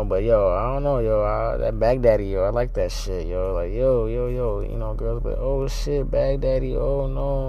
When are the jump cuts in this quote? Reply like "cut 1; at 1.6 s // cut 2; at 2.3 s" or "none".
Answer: none